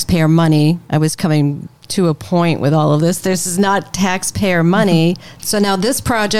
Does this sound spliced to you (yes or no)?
yes